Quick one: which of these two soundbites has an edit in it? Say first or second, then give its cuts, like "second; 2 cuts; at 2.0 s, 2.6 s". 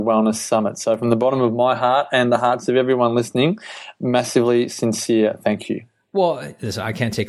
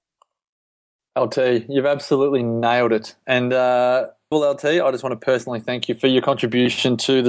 second; 1 cut; at 4.3 s